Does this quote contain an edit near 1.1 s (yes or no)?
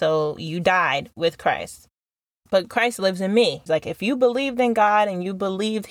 no